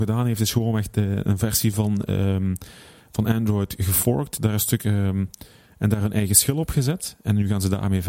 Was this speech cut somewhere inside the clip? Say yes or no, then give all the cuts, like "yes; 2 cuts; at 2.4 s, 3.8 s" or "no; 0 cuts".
no; 0 cuts